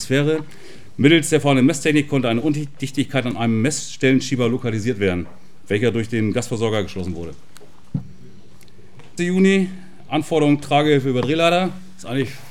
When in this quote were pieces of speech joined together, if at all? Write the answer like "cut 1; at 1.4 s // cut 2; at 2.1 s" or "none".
cut 1; at 9.2 s